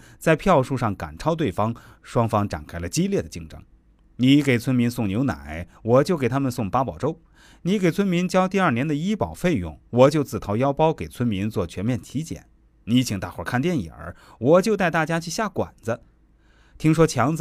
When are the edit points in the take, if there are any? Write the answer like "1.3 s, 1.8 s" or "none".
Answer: none